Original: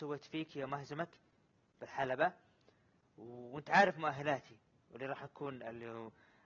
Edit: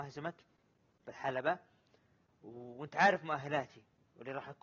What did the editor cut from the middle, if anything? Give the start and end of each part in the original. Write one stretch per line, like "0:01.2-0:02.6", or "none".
none